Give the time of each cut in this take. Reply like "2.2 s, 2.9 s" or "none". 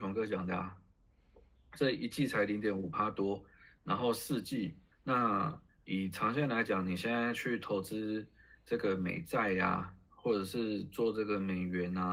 4.9 s